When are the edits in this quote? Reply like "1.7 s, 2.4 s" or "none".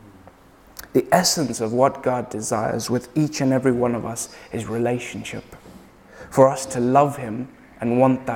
none